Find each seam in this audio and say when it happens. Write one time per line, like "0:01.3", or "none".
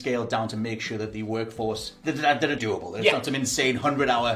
0:02.6